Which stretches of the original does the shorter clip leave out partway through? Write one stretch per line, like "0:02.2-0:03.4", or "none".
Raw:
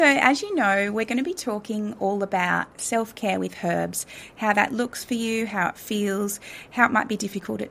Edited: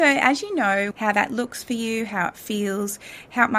0:00.9-0:04.3